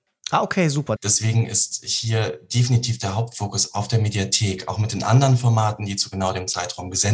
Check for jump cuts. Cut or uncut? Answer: cut